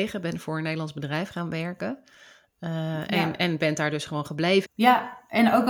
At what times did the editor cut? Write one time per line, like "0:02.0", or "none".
0:04.7